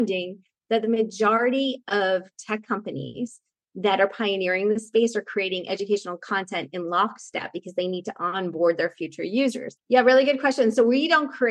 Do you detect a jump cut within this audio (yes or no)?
yes